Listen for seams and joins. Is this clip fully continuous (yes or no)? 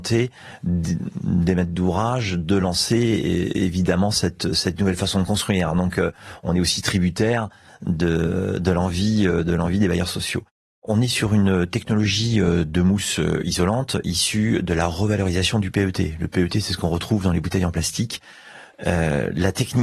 no